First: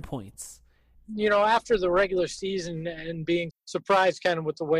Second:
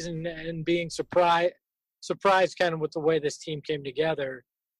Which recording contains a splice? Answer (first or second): first